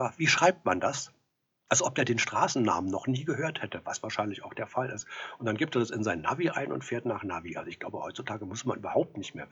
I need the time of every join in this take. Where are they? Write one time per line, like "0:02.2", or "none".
none

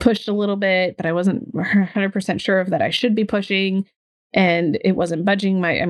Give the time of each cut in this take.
none

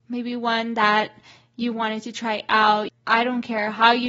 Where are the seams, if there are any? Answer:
0:02.9

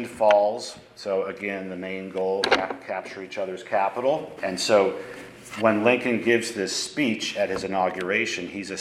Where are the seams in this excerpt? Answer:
0:04.4

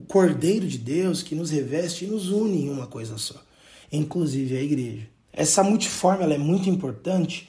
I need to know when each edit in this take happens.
0:03.8
0:05.3

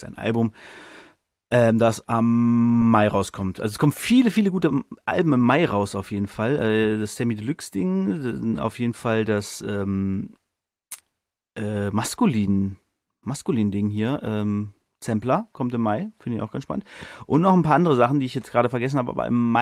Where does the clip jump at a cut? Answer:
none

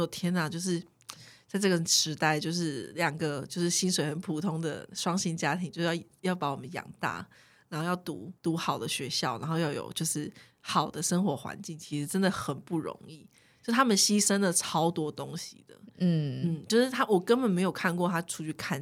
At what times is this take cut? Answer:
0:08.4

